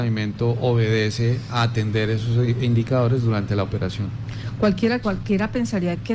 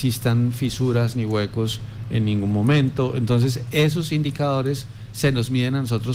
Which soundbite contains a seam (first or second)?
first